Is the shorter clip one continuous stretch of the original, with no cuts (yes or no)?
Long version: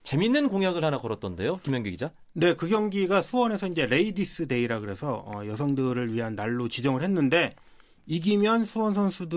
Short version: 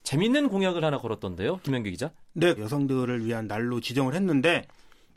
no